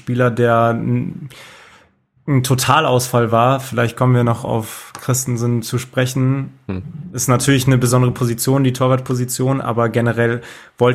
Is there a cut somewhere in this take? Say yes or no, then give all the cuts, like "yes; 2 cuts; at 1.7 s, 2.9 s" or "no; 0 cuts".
no; 0 cuts